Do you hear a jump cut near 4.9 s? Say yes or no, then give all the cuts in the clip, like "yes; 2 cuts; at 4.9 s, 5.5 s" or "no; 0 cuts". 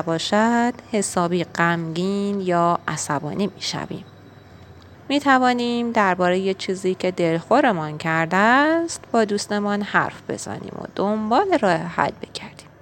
yes; 1 cut; at 4.9 s